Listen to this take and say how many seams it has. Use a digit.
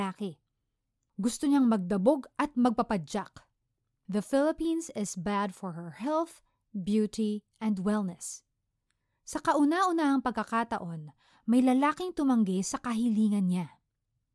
1